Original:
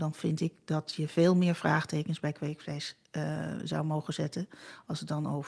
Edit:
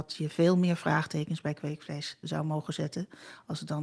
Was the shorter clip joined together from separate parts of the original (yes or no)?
yes